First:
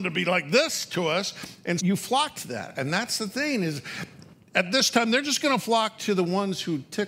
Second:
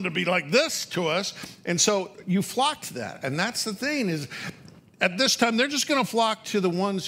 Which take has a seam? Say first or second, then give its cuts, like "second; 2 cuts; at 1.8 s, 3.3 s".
first; 1 cut; at 1.8 s